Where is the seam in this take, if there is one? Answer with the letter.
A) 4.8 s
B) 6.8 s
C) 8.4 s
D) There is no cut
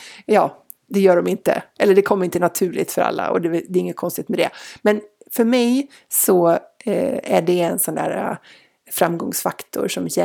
D